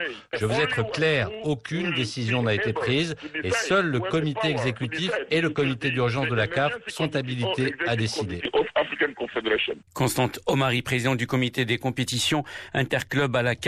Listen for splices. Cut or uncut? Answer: cut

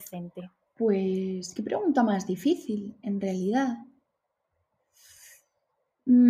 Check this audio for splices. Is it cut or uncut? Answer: uncut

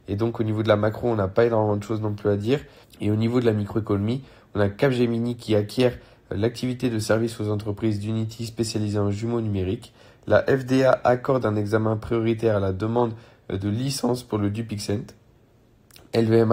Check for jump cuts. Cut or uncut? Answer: cut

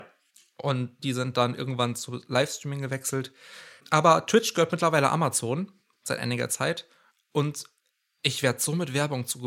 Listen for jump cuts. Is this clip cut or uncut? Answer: uncut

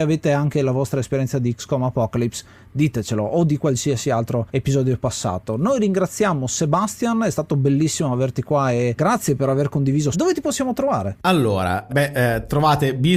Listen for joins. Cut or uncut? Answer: cut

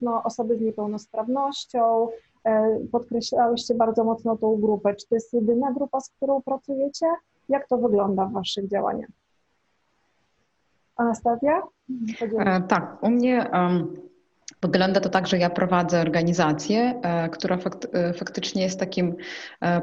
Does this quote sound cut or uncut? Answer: uncut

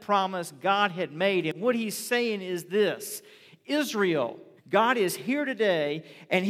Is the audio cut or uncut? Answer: cut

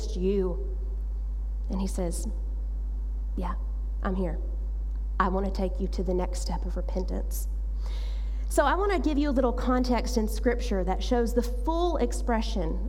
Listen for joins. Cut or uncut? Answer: uncut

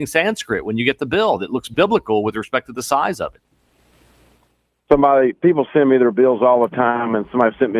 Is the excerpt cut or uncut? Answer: uncut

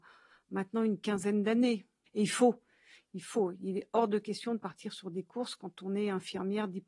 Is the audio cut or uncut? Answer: cut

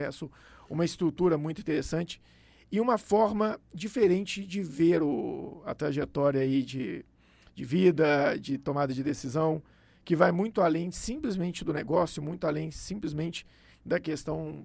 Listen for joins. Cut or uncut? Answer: uncut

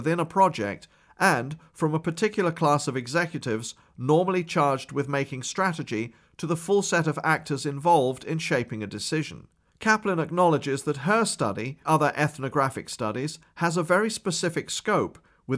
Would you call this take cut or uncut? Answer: cut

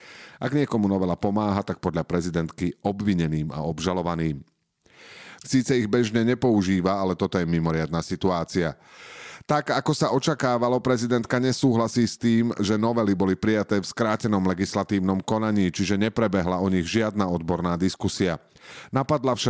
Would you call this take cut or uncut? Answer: cut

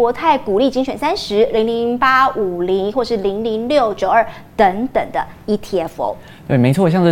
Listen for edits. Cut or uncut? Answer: uncut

